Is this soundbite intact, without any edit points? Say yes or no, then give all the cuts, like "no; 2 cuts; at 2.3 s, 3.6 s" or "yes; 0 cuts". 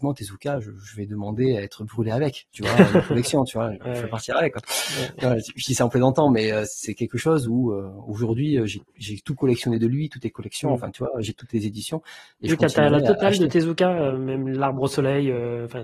yes; 0 cuts